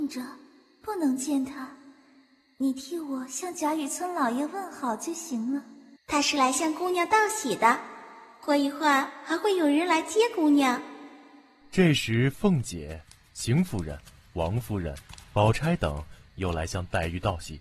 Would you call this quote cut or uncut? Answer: cut